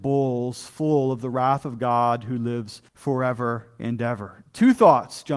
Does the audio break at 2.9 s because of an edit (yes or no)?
yes